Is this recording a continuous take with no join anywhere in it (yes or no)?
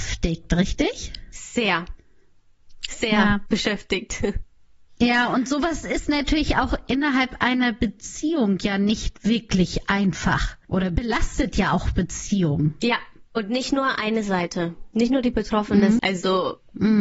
no